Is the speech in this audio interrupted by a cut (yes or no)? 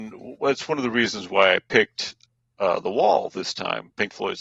no